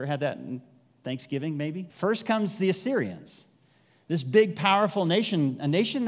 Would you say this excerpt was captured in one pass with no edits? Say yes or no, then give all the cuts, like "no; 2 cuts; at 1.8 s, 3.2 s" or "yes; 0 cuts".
no; 1 cut; at 1.9 s